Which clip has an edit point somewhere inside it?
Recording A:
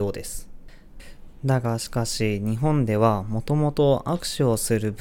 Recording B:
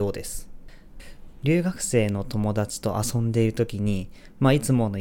B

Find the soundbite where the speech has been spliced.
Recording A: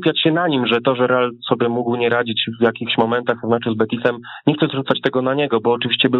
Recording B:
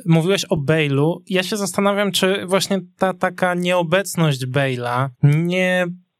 B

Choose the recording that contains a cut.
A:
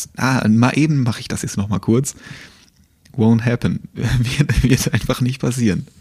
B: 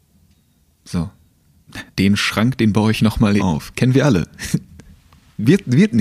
B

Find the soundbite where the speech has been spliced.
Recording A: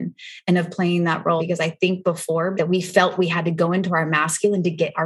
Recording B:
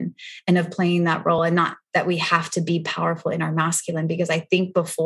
A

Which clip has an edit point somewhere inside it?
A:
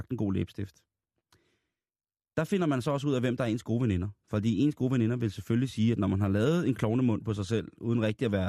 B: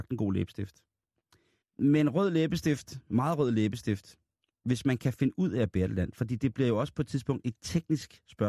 B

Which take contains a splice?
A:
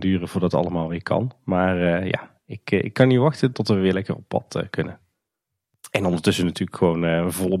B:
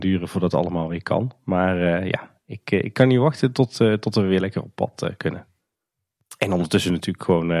A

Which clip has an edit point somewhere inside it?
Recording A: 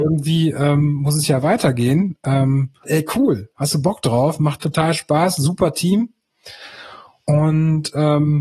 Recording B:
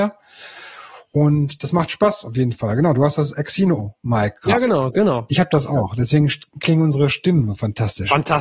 A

